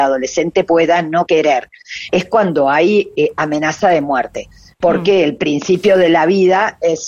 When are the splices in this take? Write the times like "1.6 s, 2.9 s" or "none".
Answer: 2.1 s